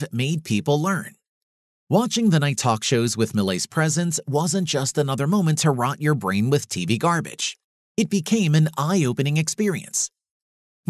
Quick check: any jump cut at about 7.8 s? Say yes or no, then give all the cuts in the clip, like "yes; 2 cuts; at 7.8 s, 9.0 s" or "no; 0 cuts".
no; 0 cuts